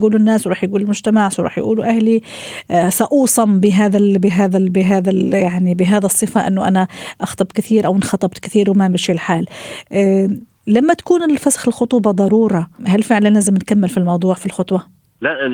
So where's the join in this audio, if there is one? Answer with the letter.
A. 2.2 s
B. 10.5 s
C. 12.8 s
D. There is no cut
C